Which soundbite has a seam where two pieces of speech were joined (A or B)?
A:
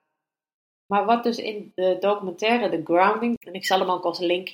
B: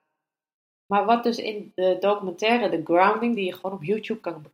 A